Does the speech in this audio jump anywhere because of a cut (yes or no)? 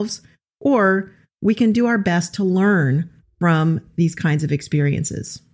no